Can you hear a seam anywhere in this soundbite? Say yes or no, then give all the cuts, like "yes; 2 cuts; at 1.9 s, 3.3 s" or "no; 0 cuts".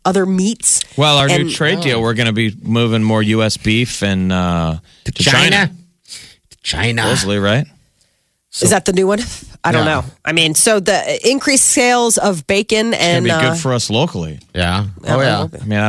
no; 0 cuts